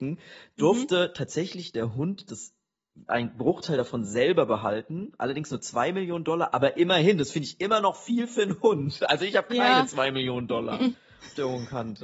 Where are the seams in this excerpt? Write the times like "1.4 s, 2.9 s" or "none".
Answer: none